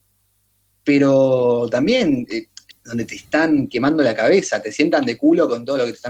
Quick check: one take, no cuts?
no; 1 cut; at 2.7 s

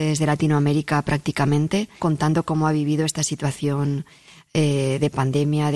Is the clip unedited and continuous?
no; 1 cut; at 2.0 s

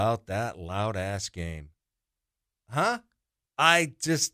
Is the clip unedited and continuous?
yes; 0 cuts

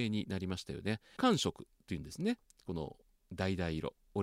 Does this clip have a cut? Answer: yes; 1 cut; at 1.2 s

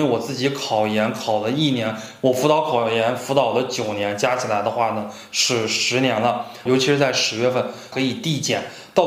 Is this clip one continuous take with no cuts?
no; 2 cuts; at 6.7 s, 7.9 s

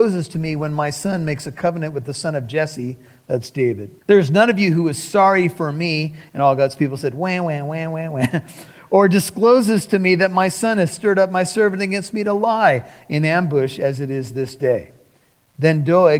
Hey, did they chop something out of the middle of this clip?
yes; 1 cut; at 4.0 s

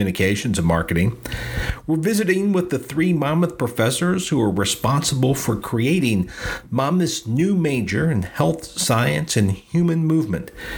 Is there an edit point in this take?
no; 0 cuts

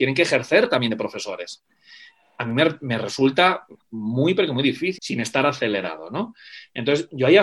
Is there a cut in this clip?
yes; 1 cut; at 5.0 s

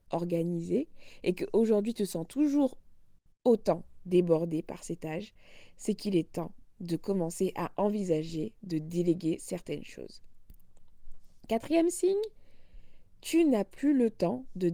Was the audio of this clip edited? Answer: no; 0 cuts

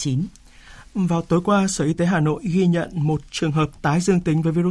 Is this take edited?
no; 0 cuts

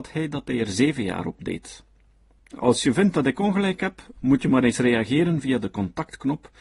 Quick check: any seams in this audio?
yes; 1 cut; at 2.4 s

